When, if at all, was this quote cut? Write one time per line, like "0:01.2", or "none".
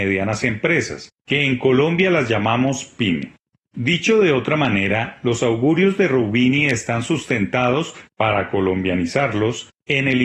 none